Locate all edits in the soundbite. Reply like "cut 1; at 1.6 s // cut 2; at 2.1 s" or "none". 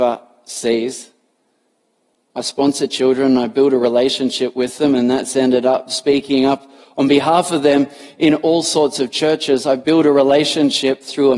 none